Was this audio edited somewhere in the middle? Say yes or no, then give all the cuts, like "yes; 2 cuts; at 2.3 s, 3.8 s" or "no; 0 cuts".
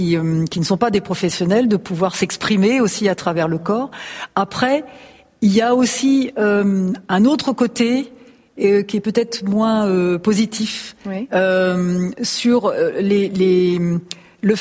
no; 0 cuts